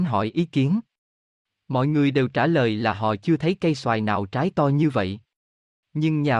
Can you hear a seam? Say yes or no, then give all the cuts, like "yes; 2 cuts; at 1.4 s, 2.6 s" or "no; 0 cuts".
no; 0 cuts